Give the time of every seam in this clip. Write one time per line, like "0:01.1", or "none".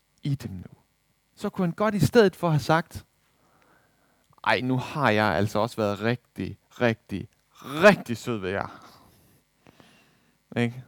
0:01.3